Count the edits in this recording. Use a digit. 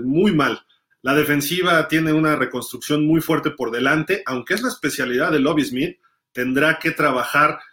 1